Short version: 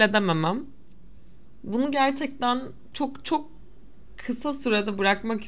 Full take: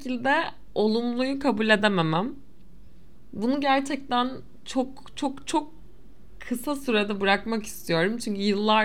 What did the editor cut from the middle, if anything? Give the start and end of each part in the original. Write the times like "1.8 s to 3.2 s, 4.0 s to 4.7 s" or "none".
4.6 s to 5.1 s